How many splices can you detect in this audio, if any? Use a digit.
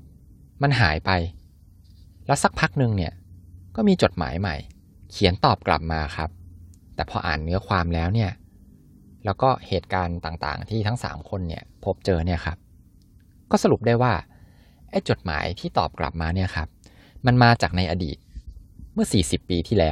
0